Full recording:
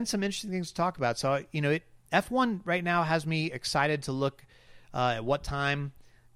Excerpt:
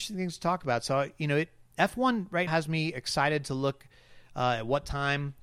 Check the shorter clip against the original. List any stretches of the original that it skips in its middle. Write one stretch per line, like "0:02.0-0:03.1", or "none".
0:02.8-0:03.1